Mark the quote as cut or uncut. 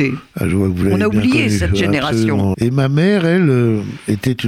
cut